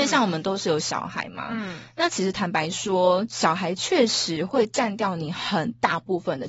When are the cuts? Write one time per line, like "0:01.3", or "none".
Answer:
none